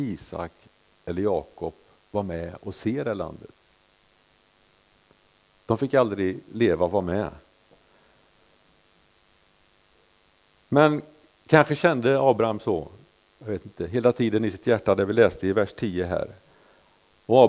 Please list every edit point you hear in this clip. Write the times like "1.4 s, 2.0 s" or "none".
none